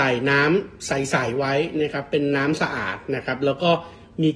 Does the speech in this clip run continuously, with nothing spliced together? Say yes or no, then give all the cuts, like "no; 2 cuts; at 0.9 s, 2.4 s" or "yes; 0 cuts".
yes; 0 cuts